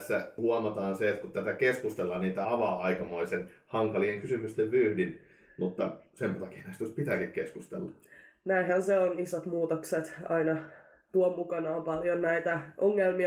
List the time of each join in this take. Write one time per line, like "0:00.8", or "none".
0:02.4

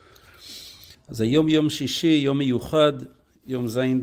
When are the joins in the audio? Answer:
0:00.9

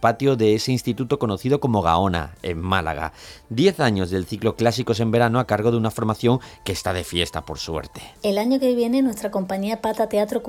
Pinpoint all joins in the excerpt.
0:08.1

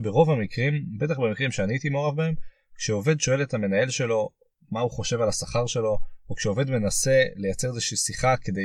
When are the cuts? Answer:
none

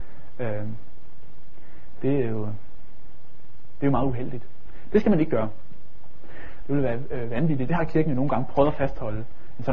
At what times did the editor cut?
0:06.6
0:07.7

